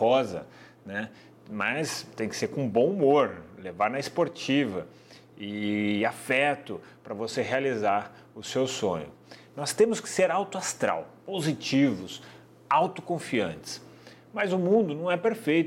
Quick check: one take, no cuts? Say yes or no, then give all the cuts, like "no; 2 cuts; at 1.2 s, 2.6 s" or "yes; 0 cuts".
yes; 0 cuts